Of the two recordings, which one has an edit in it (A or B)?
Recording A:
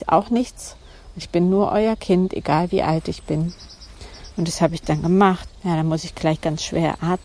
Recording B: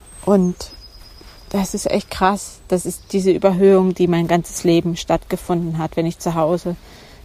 A